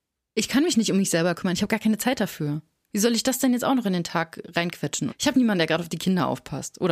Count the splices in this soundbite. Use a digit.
1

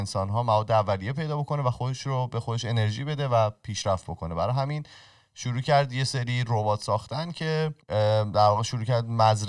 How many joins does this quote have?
1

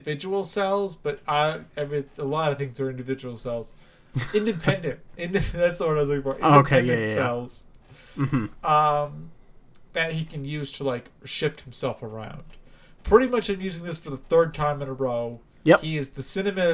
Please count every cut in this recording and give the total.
0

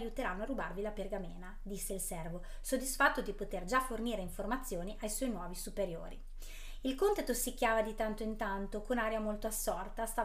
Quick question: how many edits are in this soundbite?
0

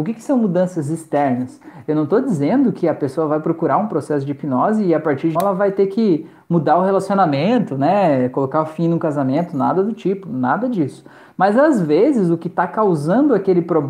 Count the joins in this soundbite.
1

